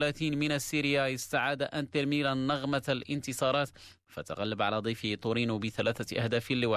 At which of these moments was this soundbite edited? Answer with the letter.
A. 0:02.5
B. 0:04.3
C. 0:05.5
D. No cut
D